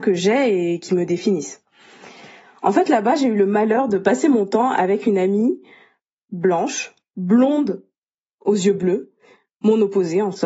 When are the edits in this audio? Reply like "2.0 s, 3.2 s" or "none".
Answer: none